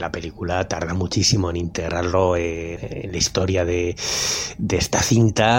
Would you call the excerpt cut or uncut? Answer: cut